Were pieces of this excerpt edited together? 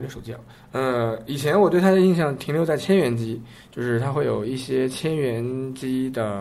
no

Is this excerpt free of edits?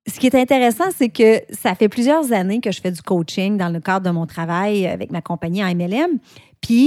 yes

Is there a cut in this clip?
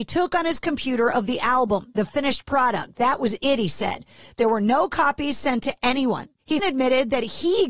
yes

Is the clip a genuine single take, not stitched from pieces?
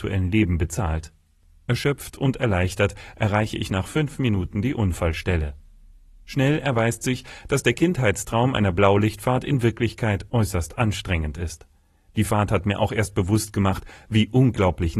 yes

